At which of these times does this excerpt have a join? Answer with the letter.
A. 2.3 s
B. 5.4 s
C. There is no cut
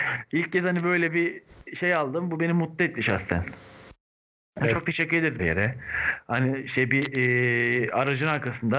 B